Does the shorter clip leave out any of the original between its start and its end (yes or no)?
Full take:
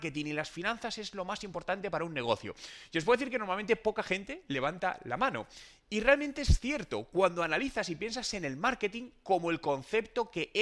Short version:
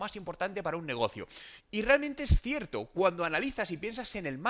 yes